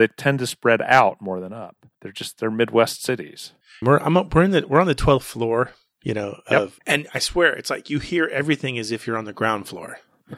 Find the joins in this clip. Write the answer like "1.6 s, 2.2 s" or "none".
1.9 s, 3.8 s, 6.8 s